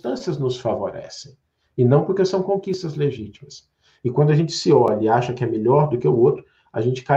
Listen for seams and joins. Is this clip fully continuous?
yes; 0 cuts

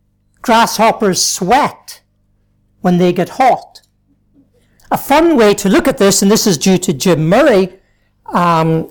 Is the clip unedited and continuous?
no; 1 cut; at 4.8 s

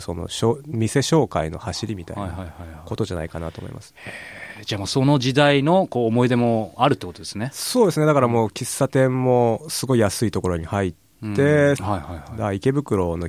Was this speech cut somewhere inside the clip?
yes; 1 cut; at 11.8 s

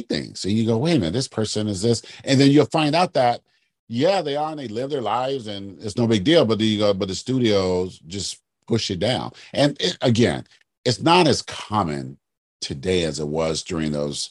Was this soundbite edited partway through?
no; 0 cuts

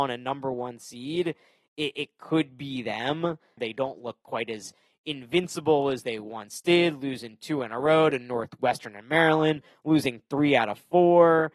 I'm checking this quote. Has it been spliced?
yes; 1 cut; at 3.6 s

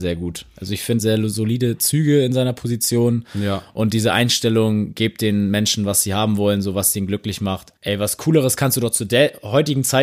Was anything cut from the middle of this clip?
yes; 2 cuts; at 1.0 s, 7.8 s

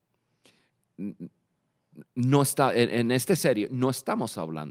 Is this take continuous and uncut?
no; 1 cut; at 2.1 s

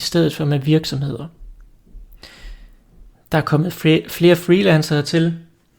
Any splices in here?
yes; 1 cut; at 3.1 s

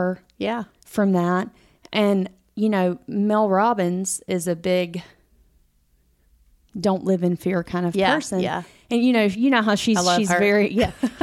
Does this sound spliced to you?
no; 0 cuts

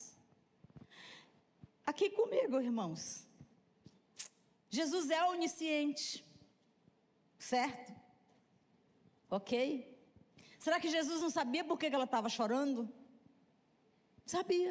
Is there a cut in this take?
no; 0 cuts

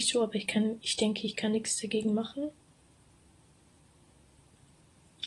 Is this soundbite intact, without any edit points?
yes; 0 cuts

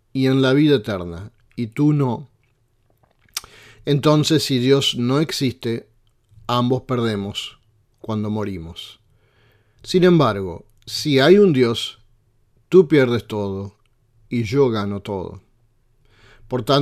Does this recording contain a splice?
no; 0 cuts

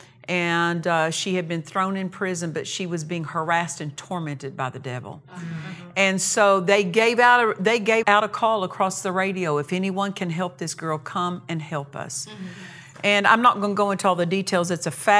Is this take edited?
yes; 1 cut; at 8.0 s

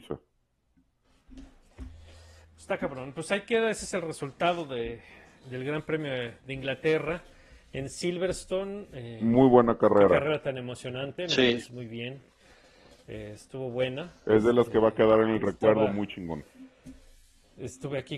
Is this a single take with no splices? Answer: yes; 0 cuts

